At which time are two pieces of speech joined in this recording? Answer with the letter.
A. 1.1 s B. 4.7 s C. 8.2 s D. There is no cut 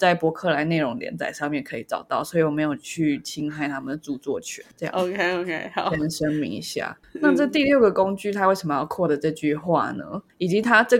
D